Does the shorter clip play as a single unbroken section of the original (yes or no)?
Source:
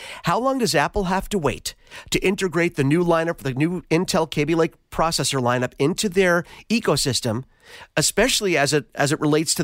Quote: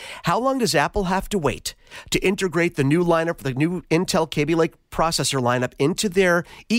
yes